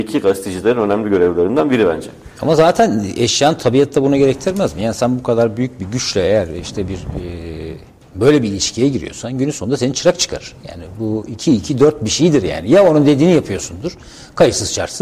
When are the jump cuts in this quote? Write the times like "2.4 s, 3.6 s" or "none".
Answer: none

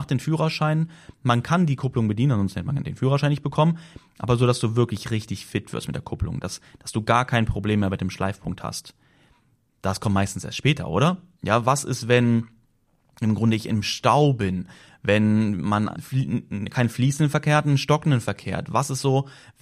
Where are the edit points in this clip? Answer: 11.4 s, 16.0 s

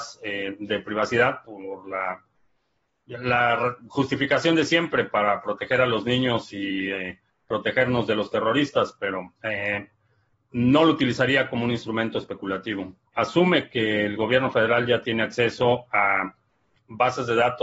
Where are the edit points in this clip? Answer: 9.4 s, 13.1 s

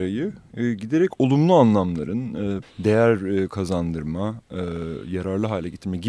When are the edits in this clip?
2.6 s

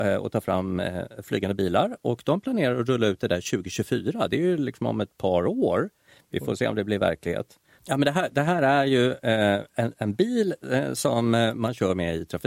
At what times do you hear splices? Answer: 7.8 s

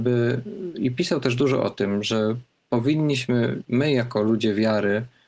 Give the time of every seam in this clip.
none

